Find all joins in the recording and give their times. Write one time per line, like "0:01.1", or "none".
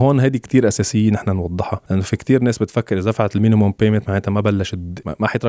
0:01.8